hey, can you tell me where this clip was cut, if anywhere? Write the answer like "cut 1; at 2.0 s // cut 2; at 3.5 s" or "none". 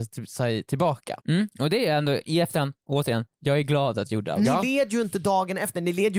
cut 1; at 1.2 s